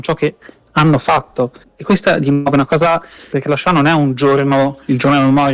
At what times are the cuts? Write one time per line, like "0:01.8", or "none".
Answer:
0:01.6
0:03.3